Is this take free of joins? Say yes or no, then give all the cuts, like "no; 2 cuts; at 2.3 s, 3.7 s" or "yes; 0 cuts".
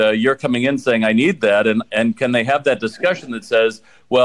yes; 0 cuts